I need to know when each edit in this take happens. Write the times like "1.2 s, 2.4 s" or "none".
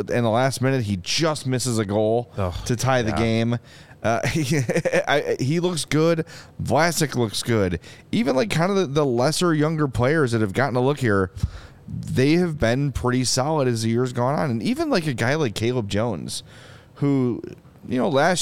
none